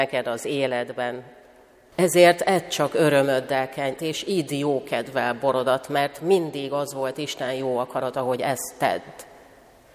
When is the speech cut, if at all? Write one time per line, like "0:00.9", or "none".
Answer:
0:01.9
0:04.0